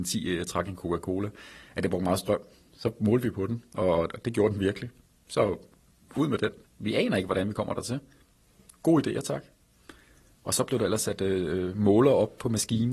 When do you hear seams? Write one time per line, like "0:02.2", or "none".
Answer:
0:06.6